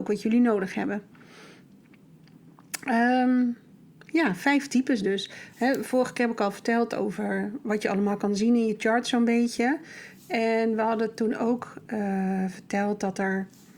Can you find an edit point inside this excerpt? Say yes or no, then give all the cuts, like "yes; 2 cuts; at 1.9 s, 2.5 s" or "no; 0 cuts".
no; 0 cuts